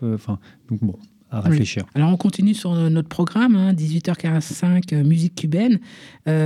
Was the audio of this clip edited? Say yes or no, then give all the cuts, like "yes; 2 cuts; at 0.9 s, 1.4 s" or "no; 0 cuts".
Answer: yes; 1 cut; at 1.9 s